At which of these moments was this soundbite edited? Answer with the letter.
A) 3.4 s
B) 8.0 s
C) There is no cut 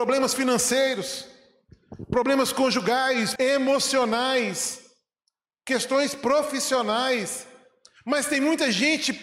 A